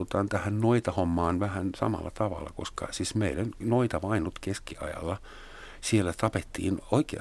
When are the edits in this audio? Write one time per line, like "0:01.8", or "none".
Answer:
none

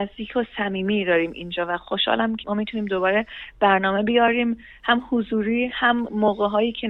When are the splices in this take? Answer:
0:02.4

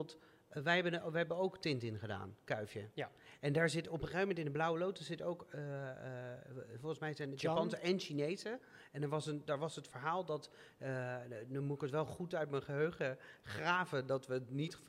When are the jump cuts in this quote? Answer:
none

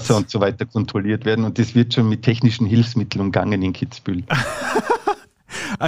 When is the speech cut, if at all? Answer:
none

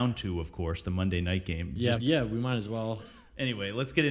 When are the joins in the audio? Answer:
0:01.9
0:03.0

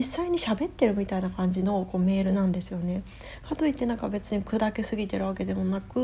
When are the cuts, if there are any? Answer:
none

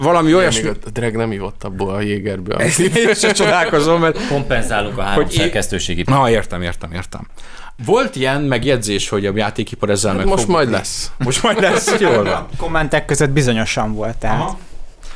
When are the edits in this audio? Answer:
0:06.0
0:07.8

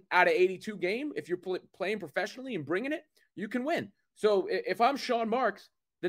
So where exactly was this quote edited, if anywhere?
none

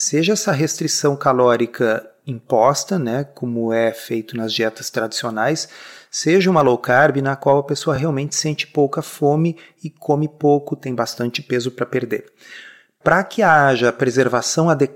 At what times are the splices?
none

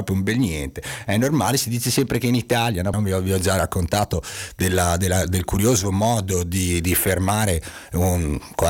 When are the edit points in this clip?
0:02.9

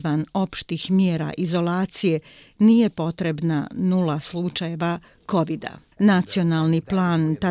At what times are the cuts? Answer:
0:05.9

